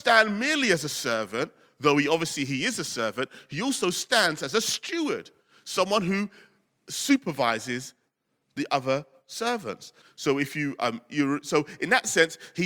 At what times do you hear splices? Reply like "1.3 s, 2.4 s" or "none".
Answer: 10.0 s